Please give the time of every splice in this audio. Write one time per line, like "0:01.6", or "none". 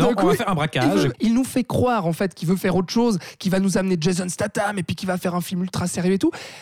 0:01.1